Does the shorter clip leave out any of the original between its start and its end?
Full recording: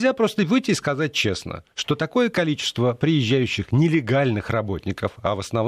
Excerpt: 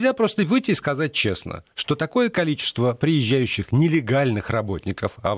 no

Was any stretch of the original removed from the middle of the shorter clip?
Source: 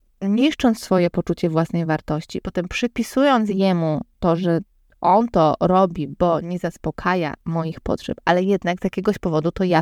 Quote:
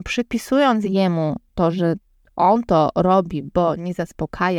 no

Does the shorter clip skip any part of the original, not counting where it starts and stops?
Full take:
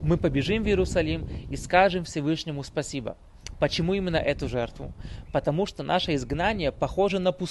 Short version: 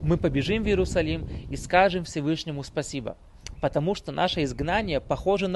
yes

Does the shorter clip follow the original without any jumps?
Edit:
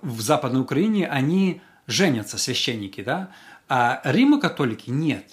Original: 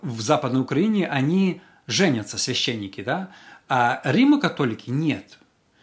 yes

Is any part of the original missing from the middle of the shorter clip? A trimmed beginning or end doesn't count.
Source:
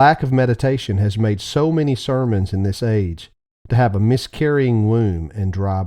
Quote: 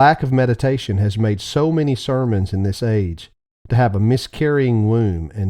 no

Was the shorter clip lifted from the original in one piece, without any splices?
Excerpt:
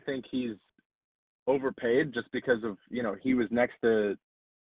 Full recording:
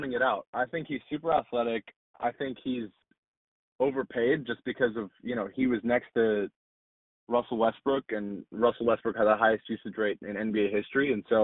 yes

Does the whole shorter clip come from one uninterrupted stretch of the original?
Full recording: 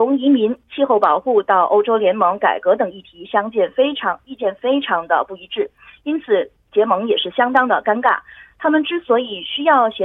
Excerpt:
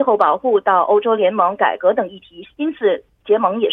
no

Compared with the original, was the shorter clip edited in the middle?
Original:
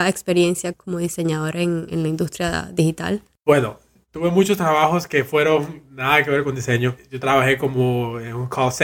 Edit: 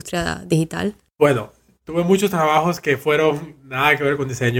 no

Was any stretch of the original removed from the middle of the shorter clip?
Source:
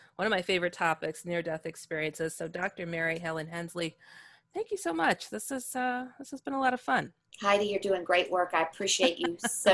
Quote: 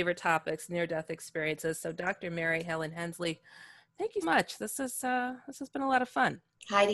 yes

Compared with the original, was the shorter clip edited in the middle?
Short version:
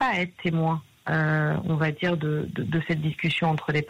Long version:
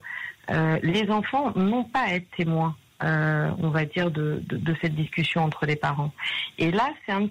no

